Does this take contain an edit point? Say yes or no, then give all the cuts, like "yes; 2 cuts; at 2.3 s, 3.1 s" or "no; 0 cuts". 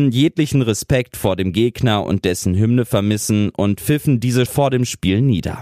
yes; 1 cut; at 4.5 s